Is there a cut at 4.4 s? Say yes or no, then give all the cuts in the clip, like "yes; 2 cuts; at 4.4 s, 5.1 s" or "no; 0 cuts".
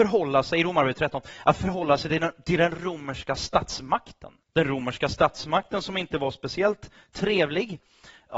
yes; 1 cut; at 4.4 s